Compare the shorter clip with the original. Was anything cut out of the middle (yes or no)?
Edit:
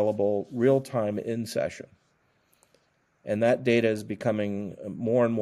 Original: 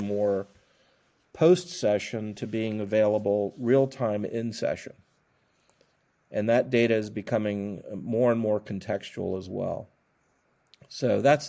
no